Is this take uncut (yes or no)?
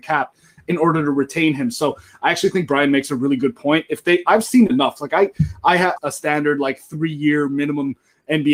no